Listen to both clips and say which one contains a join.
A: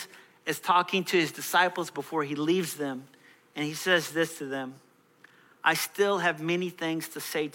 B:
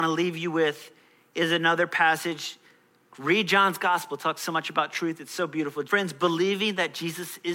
B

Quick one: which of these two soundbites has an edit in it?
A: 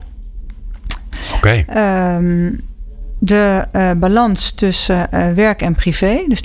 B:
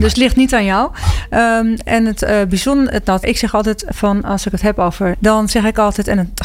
B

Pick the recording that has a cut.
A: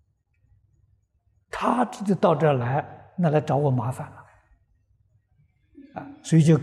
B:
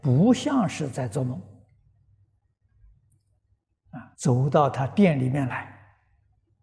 B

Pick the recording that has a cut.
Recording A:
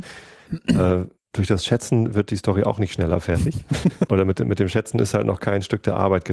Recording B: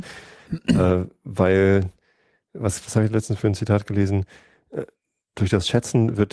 A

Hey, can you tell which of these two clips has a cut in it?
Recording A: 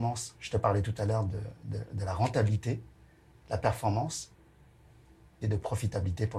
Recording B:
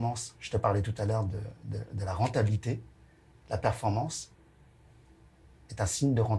A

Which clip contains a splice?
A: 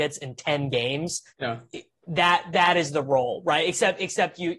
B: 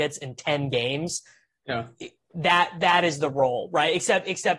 A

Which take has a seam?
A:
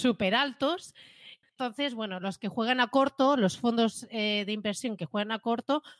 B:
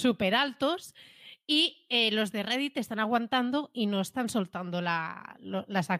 A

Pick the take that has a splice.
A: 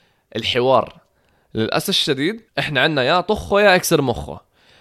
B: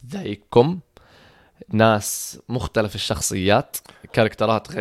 A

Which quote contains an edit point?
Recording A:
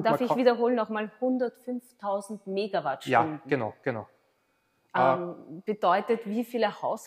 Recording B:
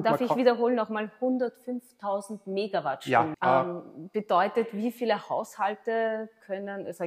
B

